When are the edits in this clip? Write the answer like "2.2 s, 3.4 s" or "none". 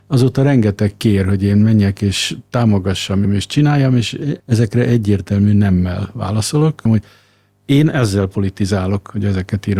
3.2 s, 4.4 s, 6.9 s